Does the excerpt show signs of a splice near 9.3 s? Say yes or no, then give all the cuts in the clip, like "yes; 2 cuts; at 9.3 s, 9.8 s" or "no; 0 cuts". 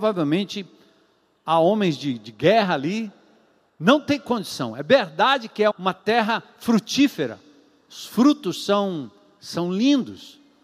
no; 1 cut; at 5.7 s